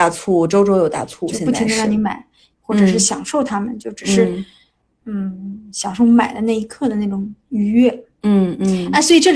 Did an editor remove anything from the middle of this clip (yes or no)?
yes